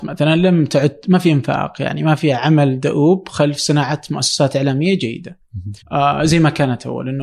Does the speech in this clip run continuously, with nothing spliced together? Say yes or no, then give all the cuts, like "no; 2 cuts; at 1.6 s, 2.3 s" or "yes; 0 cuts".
no; 1 cut; at 5.8 s